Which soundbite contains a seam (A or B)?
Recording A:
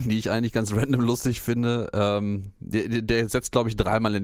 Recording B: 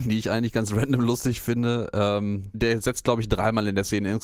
B